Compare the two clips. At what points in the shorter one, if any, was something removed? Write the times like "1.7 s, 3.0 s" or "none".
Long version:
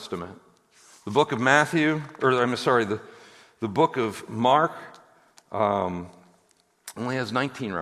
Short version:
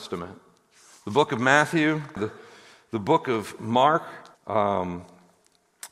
2.2 s, 4.3 s

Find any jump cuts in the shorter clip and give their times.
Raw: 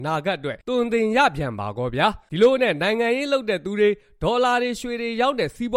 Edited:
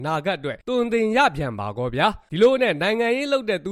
none

